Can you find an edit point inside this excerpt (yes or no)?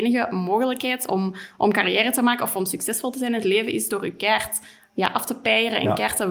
no